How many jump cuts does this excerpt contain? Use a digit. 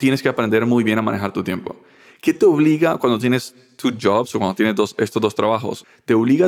0